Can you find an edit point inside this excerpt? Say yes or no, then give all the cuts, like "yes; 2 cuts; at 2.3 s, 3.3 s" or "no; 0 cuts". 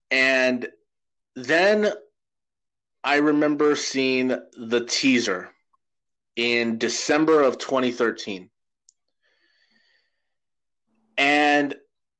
no; 0 cuts